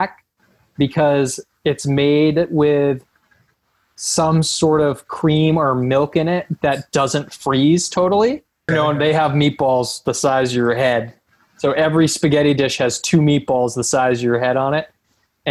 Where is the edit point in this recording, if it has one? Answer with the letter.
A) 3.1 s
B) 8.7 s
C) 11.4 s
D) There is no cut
B